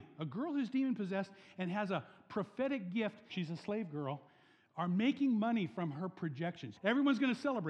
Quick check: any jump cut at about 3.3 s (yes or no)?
yes